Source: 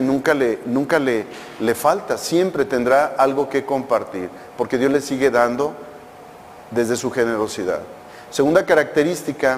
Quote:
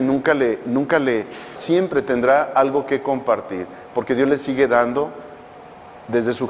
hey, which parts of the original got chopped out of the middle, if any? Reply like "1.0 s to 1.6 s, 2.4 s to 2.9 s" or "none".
1.6 s to 2.2 s